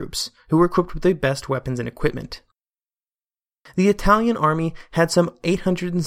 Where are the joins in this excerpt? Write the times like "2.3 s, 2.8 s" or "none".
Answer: none